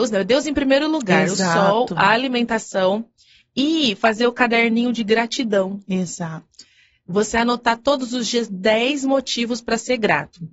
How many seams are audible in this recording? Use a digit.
0